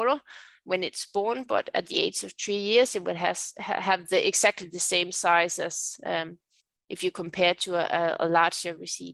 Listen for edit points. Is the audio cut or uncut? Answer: uncut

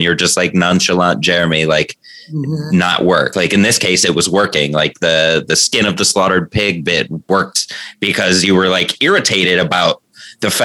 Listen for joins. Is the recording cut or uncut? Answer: uncut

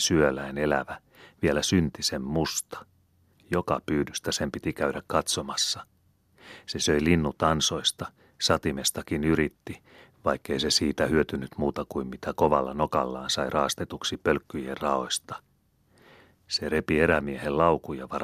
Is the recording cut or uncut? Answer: cut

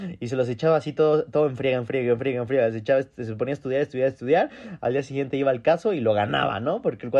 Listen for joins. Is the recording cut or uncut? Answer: uncut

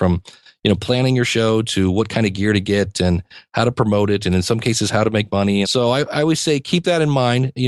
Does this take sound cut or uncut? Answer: cut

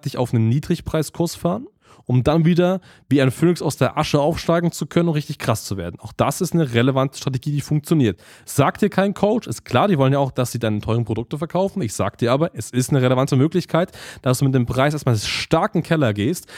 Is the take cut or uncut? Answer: uncut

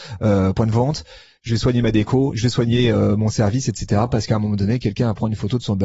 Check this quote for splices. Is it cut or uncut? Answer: uncut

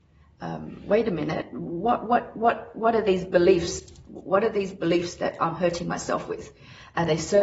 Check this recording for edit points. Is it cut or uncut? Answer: uncut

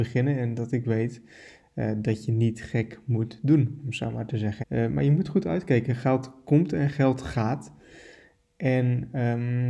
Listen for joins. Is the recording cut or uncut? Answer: cut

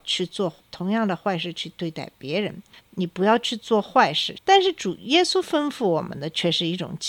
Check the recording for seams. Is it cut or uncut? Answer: cut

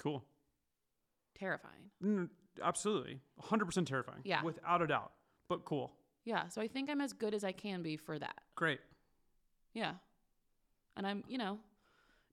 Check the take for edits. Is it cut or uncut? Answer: uncut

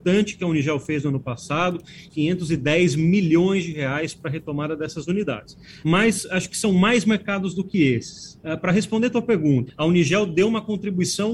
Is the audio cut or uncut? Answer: cut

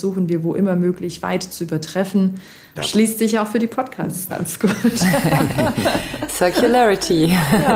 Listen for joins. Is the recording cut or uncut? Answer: cut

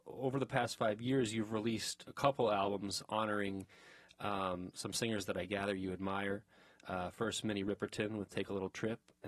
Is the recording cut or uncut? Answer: uncut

